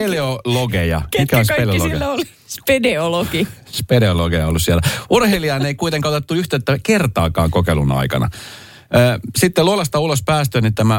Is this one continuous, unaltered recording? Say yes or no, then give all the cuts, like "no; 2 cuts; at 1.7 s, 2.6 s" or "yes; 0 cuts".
yes; 0 cuts